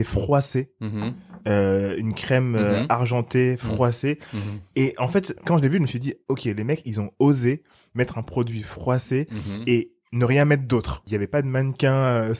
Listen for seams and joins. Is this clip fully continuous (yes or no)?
yes